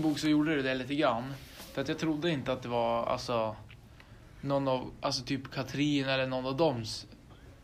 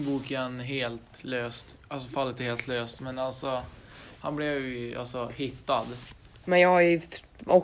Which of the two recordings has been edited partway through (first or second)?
second